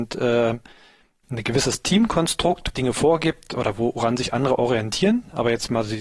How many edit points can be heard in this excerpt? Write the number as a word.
one